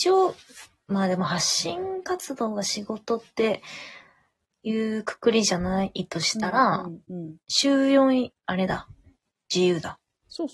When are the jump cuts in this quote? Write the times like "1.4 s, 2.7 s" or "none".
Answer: 8.4 s